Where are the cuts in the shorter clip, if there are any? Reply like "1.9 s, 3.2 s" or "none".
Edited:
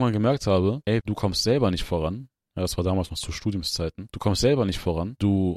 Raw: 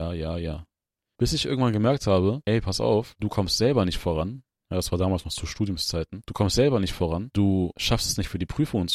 1.0 s